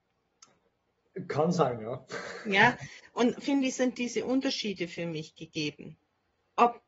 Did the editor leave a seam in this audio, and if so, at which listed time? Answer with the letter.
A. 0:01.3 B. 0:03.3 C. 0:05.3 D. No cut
B